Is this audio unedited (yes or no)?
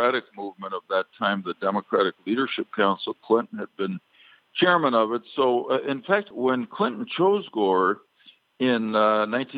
no